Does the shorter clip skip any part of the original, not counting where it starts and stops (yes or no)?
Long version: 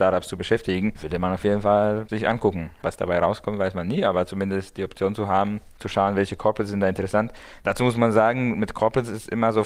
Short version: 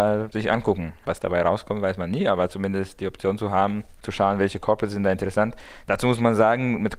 no